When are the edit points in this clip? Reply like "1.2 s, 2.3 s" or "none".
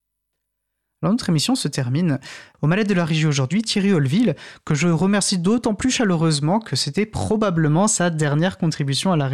2.5 s